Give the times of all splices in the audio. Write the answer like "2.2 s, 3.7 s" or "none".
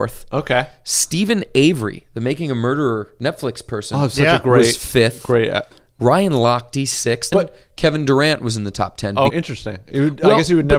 7.3 s, 9.3 s